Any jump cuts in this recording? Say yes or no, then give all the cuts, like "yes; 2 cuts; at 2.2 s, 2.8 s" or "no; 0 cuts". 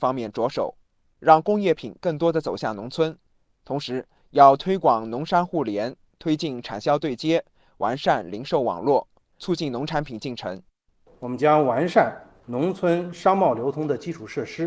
no; 0 cuts